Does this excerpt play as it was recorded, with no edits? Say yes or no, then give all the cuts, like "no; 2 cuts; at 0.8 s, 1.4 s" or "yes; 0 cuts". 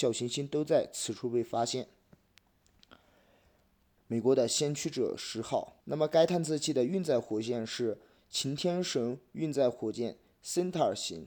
no; 2 cuts; at 4.0 s, 5.8 s